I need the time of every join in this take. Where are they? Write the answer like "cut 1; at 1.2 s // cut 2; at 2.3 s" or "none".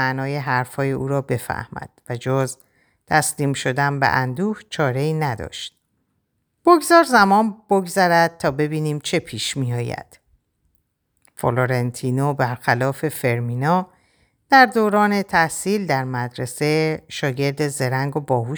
cut 1; at 6.6 s